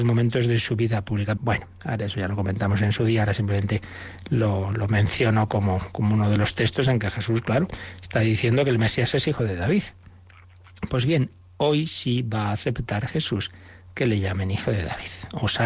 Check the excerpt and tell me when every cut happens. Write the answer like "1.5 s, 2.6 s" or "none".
1.4 s